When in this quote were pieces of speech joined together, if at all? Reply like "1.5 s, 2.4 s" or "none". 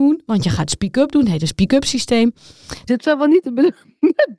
2.9 s